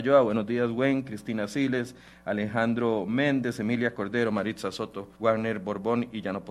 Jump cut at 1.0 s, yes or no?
no